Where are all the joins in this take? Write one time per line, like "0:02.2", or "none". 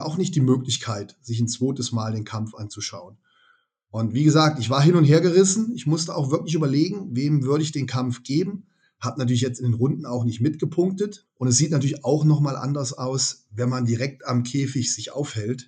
0:11.3